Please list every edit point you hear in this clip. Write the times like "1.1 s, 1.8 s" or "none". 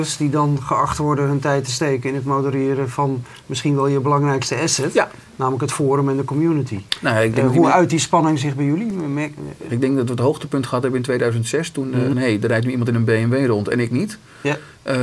9.7 s, 12.1 s